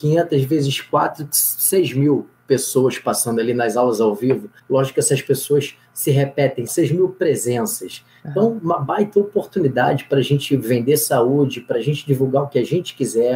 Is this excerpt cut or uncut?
cut